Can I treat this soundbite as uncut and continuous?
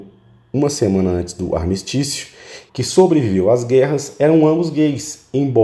no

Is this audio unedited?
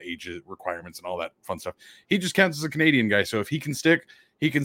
yes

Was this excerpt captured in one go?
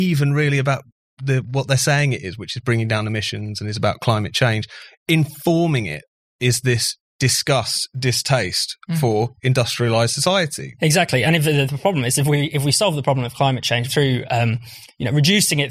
no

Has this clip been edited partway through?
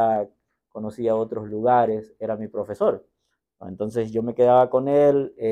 no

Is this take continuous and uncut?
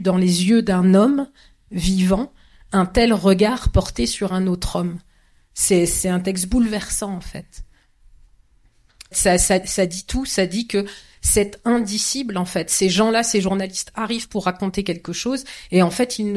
no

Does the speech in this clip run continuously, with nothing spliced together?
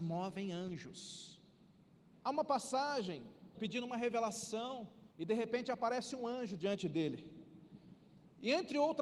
no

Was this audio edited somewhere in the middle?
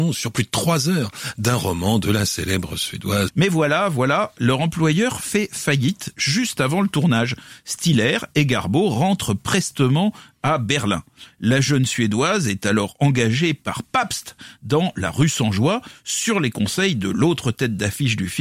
yes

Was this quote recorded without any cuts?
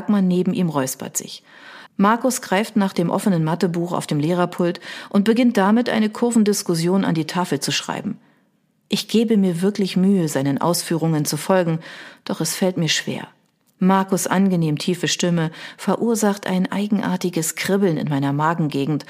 no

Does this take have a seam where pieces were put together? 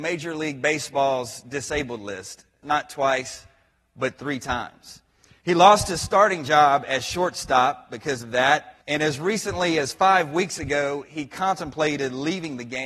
yes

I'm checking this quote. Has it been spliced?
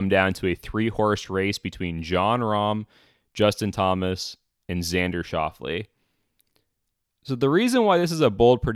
no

